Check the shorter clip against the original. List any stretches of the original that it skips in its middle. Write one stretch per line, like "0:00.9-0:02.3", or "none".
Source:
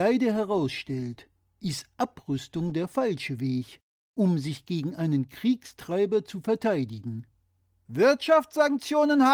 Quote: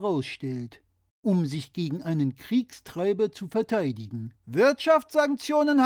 0:01.6-0:04.0
0:07.3-0:07.8